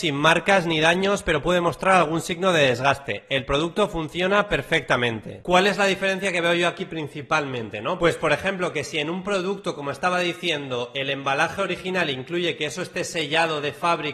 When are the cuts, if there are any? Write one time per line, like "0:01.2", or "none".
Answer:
none

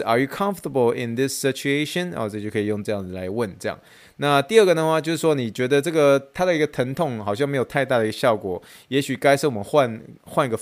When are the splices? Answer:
none

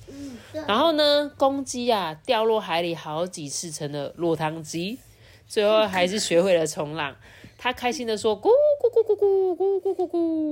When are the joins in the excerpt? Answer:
none

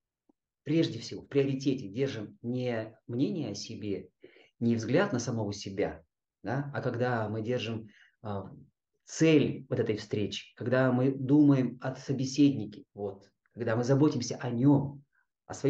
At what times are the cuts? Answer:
0:12.9

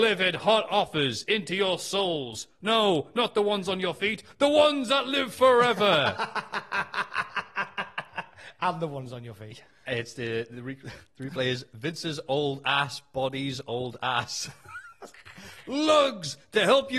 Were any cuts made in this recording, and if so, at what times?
none

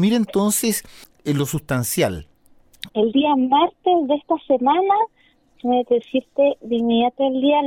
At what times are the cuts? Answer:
0:02.9

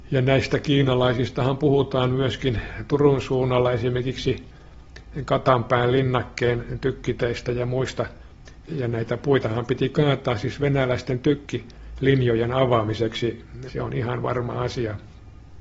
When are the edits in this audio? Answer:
0:08.7
0:13.7

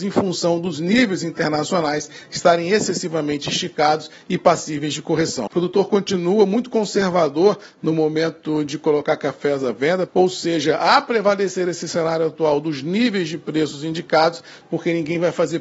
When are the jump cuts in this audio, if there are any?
0:05.5
0:10.1
0:14.6

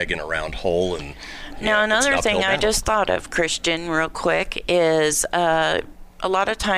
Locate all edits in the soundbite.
none

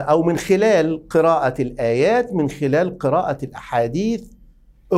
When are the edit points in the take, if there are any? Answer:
none

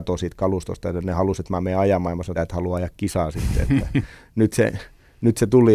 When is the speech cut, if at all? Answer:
0:02.3

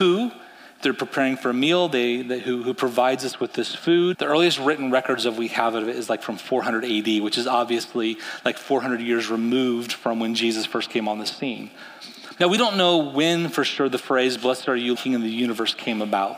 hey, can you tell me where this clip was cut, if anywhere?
0:04.1
0:12.4
0:15.0

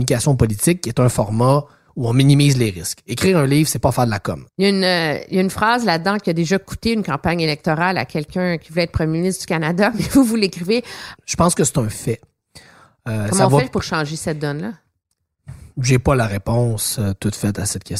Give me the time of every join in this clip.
0:04.5
0:11.2

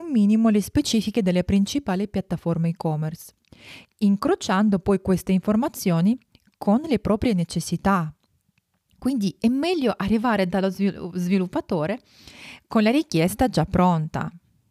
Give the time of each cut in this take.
none

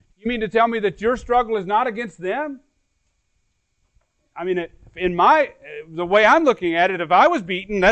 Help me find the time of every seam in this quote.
none

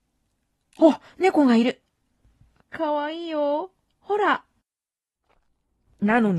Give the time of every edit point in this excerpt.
none

